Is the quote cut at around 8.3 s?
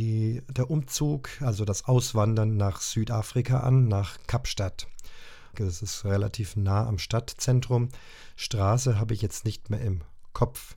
no; 1 cut; at 5.5 s

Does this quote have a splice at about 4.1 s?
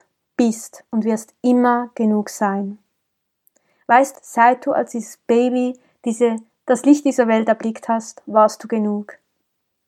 yes; 1 cut; at 4.1 s

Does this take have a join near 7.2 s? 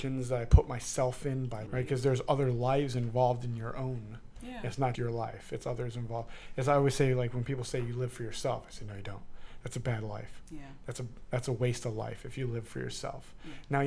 no; 2 cuts; at 1.7 s, 5.0 s

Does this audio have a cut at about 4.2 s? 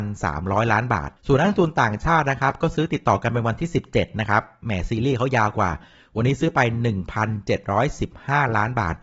no; 1 cut; at 1.2 s

